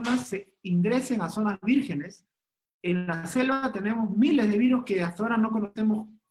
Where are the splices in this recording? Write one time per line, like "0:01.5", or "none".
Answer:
none